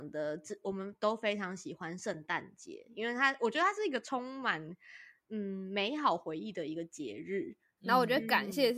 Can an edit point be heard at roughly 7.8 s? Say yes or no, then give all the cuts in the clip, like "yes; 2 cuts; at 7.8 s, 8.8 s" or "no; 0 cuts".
yes; 1 cut; at 7.8 s